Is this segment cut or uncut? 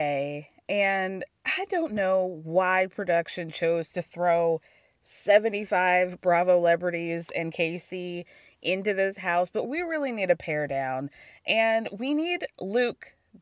uncut